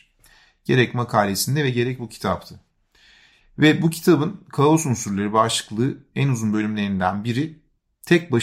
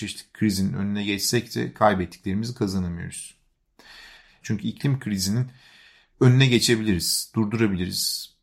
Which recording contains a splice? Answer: second; 1 cut; at 4.4 s

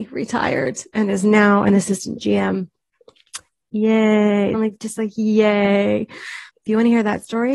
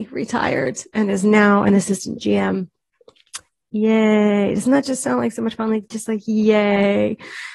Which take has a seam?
first; 2 cuts; at 4.5 s, 6.5 s

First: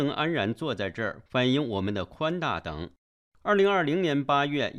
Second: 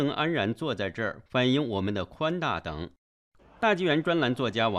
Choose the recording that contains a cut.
second; 1 cut; at 3.4 s

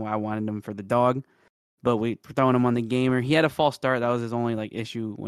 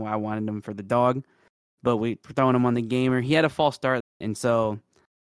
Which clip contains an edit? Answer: second; 1 cut; at 4.0 s

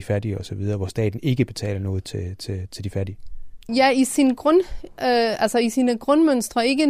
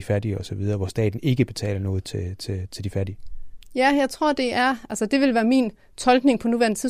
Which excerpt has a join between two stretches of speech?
first; 1 cut; at 3.7 s

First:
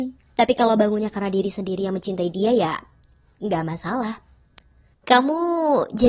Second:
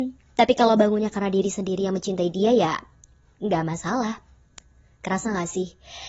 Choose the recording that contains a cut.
first; 1 cut; at 4.9 s

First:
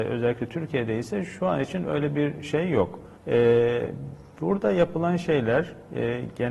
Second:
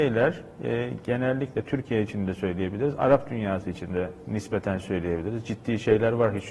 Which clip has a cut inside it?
first; 1 cut; at 3.2 s

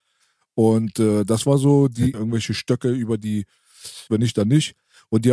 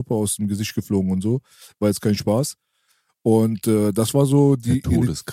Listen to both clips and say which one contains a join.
first; 2 cuts; at 2.1 s, 4.1 s

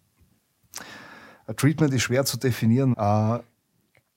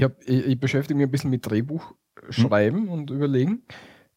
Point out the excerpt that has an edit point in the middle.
first; 1 cut; at 2.9 s

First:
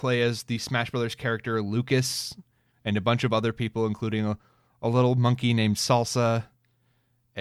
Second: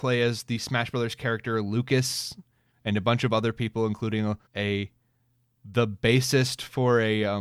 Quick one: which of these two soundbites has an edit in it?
second; 1 cut; at 4.5 s

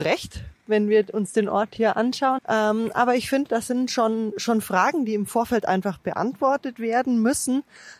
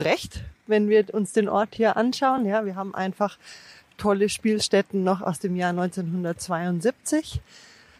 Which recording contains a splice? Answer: first; 1 cut; at 2.4 s

